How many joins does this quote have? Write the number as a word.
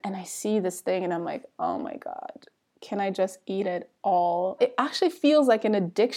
one